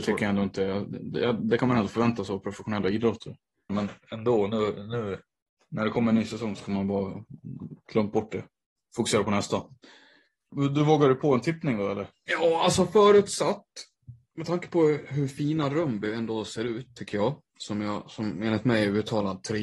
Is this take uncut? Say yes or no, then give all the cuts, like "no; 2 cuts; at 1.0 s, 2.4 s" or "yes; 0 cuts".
no; 1 cut; at 3.7 s